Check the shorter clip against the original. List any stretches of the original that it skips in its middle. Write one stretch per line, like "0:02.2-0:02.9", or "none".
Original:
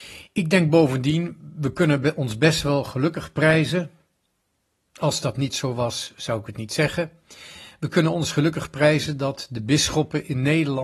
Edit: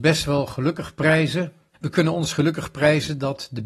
0:04.1-0:07.7